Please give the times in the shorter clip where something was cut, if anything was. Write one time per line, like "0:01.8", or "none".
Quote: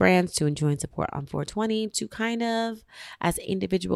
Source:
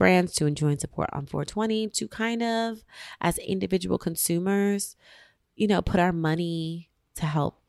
none